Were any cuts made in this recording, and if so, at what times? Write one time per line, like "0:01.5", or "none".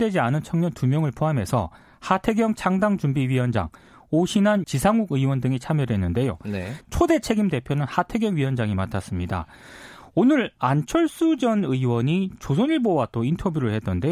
0:04.6
0:06.8